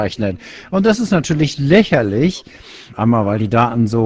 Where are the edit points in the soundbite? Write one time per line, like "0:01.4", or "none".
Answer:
0:02.9